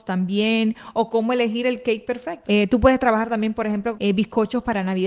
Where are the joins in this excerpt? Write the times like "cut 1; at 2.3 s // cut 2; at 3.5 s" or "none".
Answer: cut 1; at 2.4 s // cut 2; at 3.9 s